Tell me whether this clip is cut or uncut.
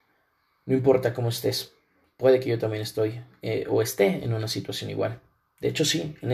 uncut